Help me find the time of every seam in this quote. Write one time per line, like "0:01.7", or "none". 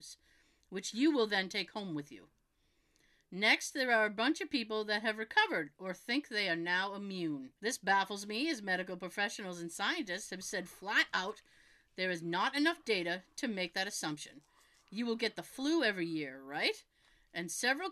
0:07.6